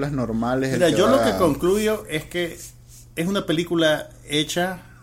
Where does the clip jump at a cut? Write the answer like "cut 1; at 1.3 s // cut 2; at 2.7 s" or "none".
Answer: none